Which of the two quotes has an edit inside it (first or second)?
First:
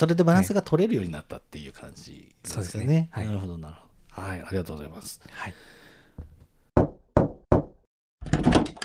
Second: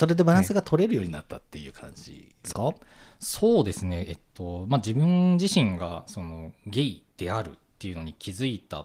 second